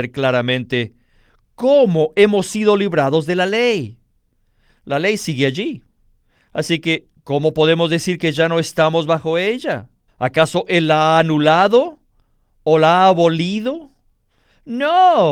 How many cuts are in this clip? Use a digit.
1